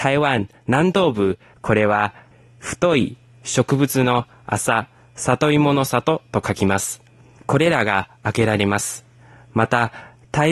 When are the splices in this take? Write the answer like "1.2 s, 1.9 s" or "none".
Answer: 1.5 s